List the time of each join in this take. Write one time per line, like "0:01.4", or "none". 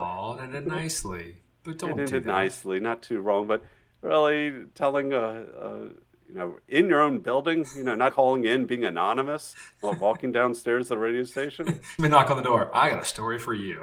0:08.1
0:12.0

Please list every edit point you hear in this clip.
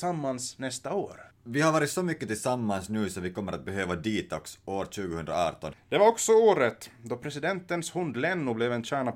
0:05.7

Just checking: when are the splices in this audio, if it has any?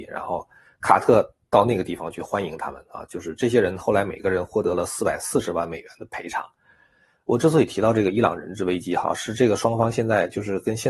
none

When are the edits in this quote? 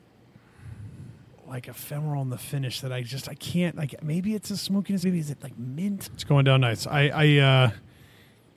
0:05.0
0:06.1

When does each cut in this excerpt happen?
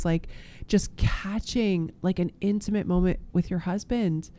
none

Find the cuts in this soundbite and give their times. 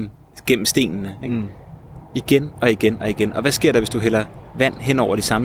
none

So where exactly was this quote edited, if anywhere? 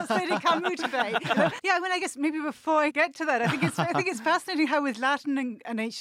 0:01.6
0:02.9

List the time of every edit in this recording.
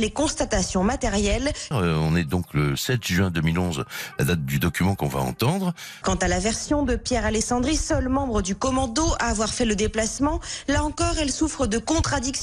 0:01.7
0:06.0

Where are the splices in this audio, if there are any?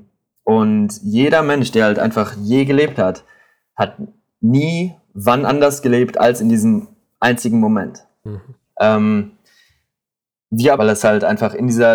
0:08.7
0:10.8

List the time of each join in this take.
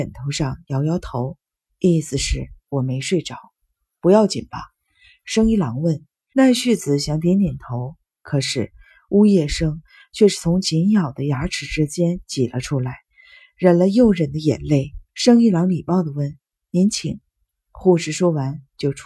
0:06.3
0:15.1

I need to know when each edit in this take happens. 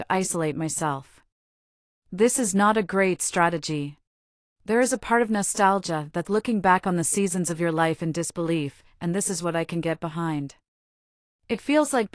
0:04.5
0:06.3

